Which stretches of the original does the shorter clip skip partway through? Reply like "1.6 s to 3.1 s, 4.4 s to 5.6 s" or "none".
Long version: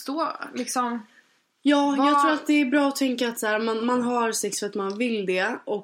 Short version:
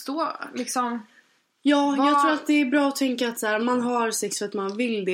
3.6 s to 3.8 s